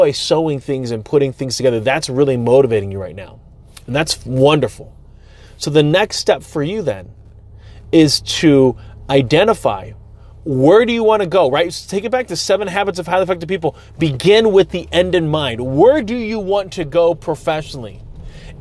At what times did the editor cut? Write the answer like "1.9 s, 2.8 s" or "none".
none